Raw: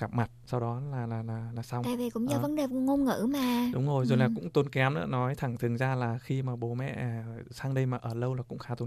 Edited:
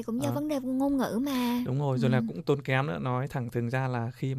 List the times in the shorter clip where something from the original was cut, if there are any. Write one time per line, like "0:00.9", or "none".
none